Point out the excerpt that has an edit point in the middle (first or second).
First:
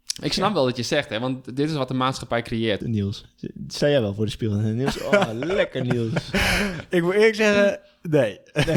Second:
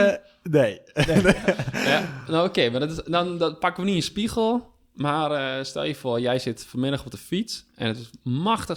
first